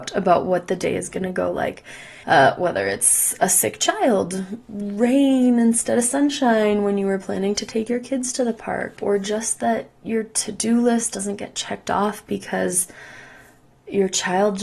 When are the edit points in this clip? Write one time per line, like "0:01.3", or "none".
0:02.2
0:09.0